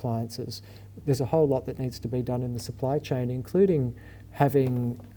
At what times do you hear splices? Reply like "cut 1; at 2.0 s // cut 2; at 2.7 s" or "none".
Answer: cut 1; at 1.0 s